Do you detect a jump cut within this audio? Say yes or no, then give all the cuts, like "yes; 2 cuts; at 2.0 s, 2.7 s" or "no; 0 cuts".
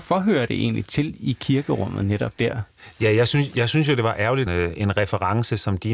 yes; 1 cut; at 4.5 s